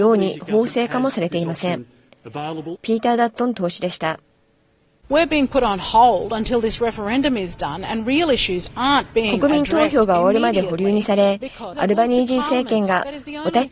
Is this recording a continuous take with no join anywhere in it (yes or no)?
no